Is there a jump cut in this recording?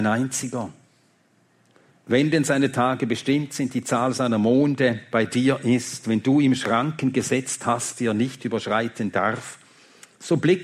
no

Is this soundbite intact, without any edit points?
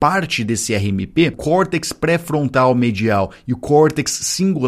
no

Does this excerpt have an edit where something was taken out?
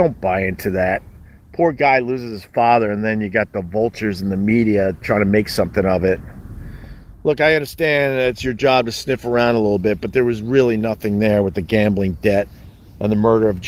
no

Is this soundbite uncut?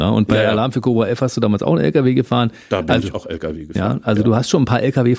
yes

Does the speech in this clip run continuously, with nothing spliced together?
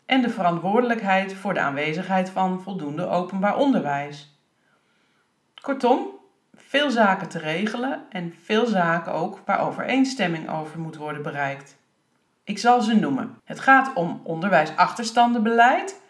no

